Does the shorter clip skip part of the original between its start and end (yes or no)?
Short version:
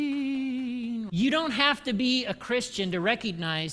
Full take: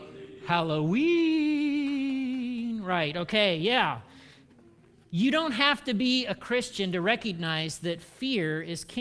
yes